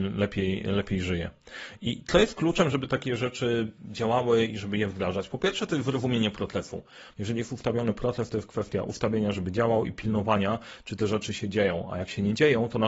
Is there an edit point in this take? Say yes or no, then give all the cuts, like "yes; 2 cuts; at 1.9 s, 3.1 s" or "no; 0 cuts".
yes; 1 cut; at 7.1 s